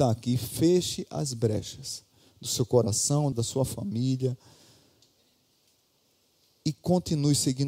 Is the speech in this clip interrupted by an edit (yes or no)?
yes